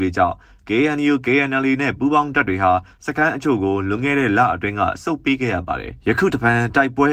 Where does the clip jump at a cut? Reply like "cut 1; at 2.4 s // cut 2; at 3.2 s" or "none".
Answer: cut 1; at 6.0 s